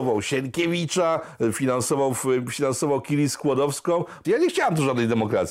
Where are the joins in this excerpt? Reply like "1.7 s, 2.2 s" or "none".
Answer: 4.2 s

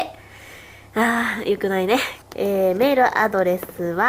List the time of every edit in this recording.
2.2 s

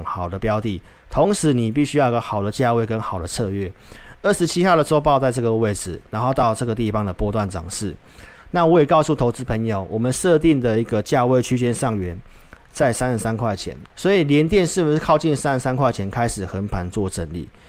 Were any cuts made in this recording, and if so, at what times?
8.4 s, 13.9 s

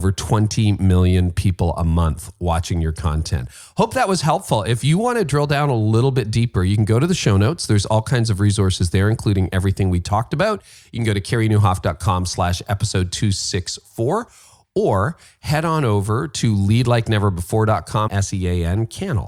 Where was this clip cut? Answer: 18.1 s

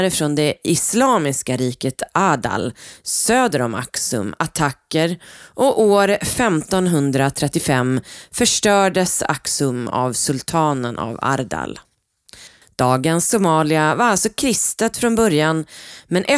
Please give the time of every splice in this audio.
12.6 s

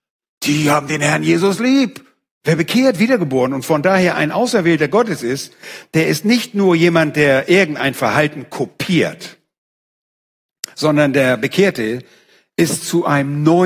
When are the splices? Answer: 2.3 s

